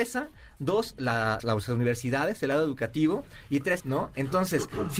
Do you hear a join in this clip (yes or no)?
yes